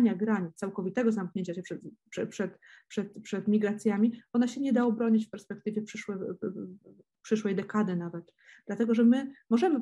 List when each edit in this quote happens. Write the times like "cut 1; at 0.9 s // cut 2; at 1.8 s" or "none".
none